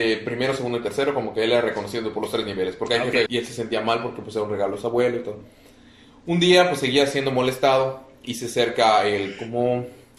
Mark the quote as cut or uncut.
cut